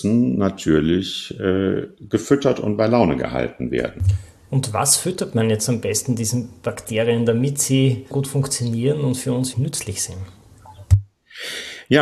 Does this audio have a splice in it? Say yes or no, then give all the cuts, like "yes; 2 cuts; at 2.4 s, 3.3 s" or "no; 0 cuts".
yes; 2 cuts; at 8.1 s, 9.5 s